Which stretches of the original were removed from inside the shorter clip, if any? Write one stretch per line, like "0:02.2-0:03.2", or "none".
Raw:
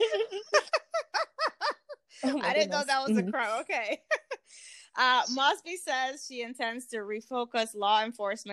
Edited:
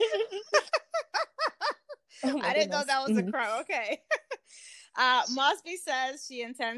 none